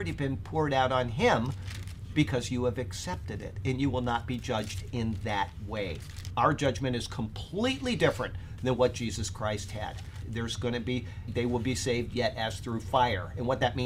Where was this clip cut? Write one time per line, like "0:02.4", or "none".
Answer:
0:06.3
0:10.2
0:11.3